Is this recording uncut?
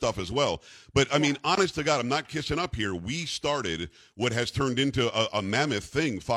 yes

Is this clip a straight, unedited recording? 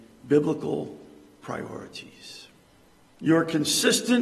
no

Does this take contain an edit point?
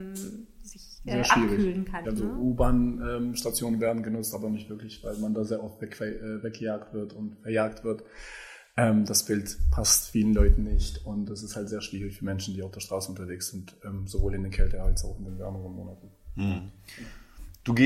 yes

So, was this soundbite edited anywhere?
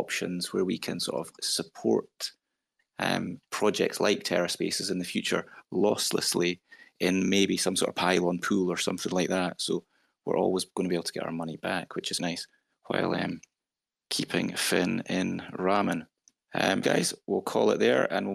yes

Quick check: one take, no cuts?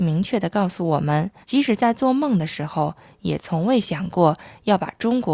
no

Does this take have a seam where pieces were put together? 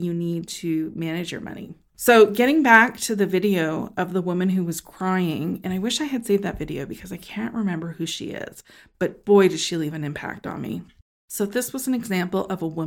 no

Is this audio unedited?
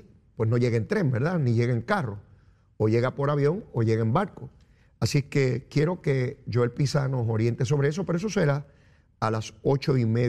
yes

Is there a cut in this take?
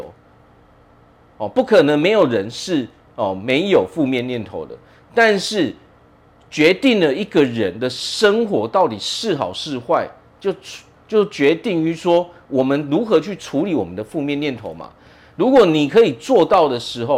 no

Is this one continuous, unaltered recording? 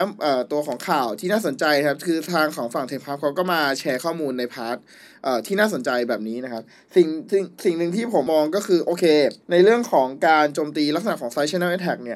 no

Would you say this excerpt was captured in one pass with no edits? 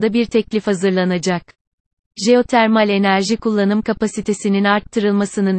yes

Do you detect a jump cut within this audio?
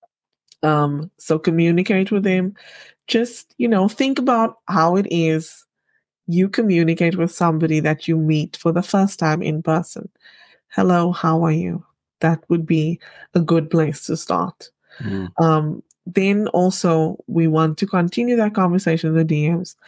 yes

